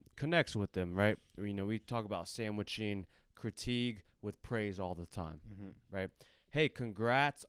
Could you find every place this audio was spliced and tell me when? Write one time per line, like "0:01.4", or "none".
none